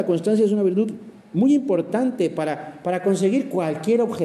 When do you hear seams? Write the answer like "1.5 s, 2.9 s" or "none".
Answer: none